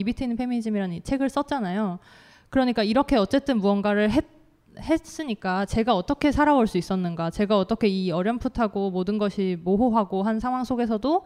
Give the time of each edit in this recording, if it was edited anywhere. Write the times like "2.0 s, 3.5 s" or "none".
none